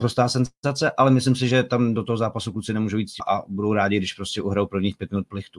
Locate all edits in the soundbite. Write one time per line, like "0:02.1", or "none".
0:03.2